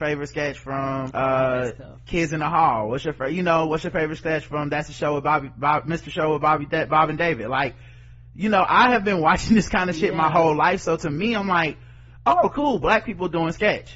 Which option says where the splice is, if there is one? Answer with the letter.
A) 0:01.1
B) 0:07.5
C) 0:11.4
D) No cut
A